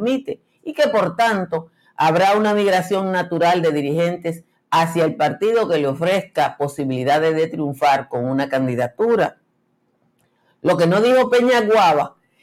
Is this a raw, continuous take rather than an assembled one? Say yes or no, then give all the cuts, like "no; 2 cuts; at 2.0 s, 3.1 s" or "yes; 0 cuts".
yes; 0 cuts